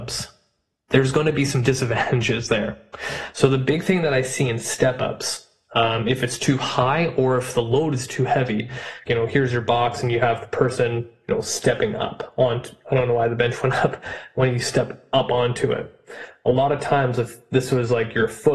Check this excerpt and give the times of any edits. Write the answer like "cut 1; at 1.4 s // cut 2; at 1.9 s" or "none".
cut 1; at 9.1 s